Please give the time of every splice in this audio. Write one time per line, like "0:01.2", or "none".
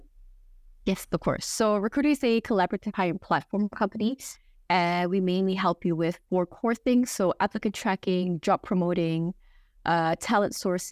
none